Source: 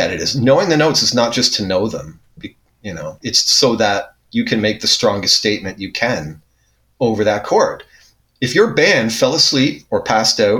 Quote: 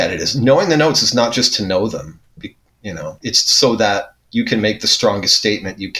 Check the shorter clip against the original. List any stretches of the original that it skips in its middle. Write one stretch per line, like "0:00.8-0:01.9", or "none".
none